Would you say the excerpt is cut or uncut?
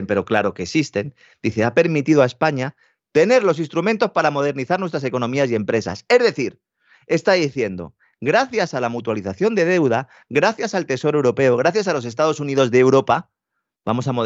uncut